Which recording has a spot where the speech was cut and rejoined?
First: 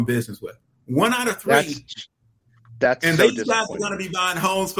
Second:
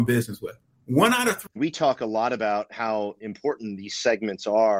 second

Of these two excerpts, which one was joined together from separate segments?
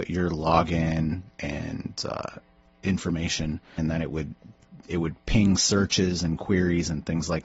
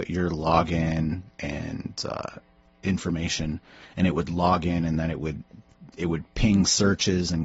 first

